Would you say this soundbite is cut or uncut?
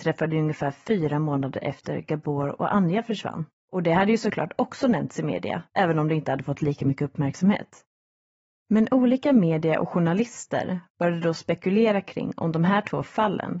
uncut